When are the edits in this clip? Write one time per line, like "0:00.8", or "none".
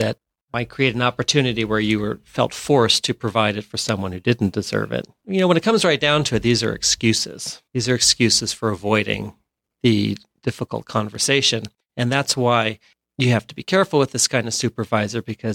0:07.7